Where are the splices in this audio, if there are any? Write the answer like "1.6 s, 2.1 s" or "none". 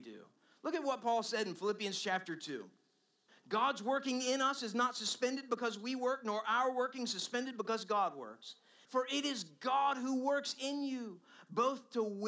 3.3 s, 8.9 s